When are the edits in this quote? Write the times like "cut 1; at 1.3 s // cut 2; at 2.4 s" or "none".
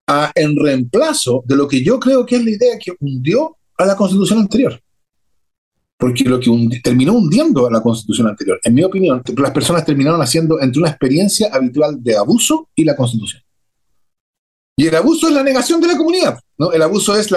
cut 1; at 9.3 s // cut 2; at 16.4 s